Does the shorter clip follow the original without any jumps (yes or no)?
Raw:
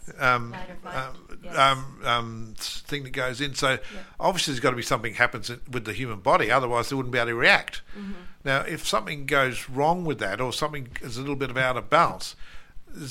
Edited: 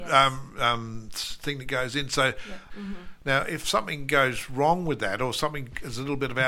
no